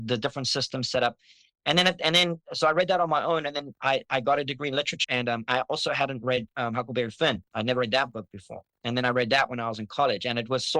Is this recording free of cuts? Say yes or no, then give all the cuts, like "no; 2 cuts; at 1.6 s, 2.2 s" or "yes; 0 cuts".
no; 1 cut; at 5.0 s